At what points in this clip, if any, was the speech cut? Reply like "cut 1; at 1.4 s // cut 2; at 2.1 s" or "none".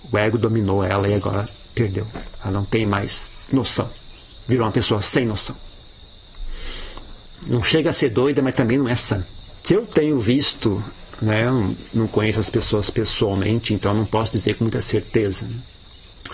cut 1; at 9.6 s